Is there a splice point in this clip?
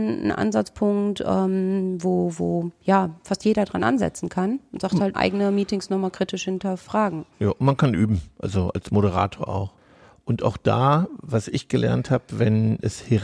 yes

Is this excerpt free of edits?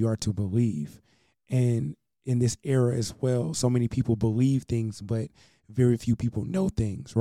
yes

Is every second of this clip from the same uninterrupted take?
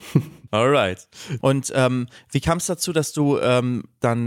no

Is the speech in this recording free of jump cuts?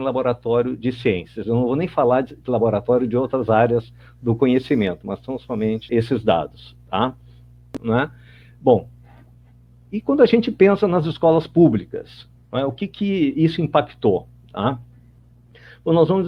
no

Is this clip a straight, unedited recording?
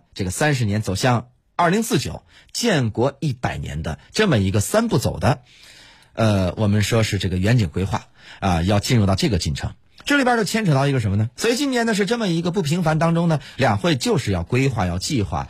no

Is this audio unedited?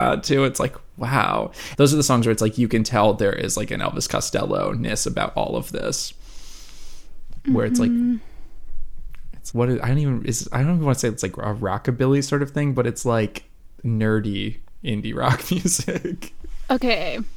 no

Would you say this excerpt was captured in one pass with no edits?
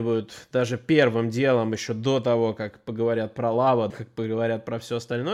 no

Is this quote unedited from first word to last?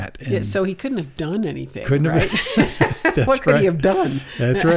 yes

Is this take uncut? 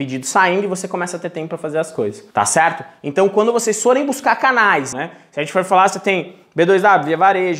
no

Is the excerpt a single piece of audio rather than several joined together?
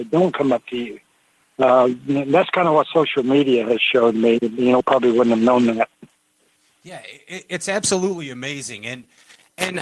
no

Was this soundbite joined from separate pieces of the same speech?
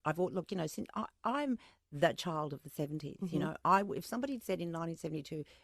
no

